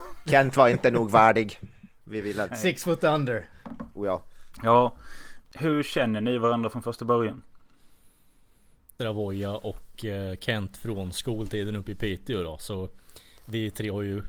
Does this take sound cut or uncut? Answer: cut